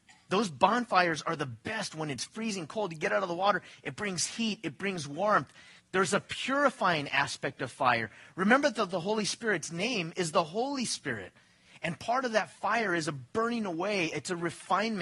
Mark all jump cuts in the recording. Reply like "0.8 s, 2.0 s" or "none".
5.8 s